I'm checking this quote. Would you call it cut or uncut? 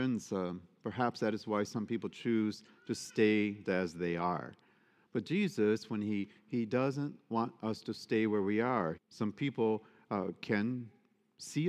cut